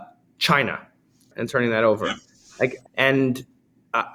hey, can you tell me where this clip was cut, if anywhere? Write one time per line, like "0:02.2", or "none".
0:01.3
0:02.9